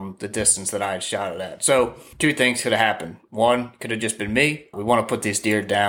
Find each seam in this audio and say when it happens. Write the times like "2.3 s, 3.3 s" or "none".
4.7 s